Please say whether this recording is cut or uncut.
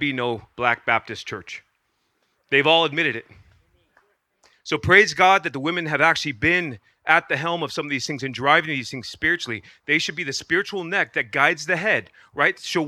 uncut